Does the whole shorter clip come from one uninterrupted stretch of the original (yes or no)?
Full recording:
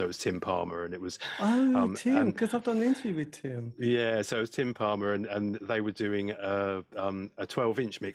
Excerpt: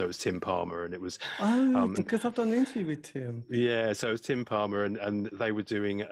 no